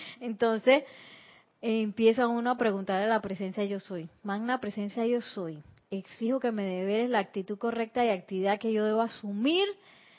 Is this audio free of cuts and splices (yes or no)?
yes